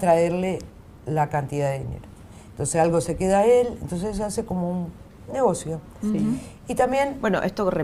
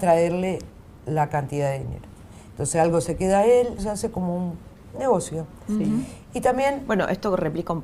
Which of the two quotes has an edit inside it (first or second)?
second